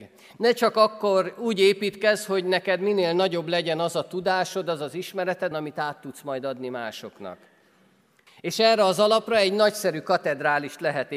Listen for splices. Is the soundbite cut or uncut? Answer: cut